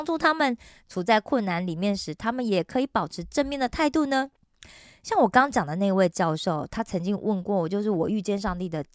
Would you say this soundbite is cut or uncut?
uncut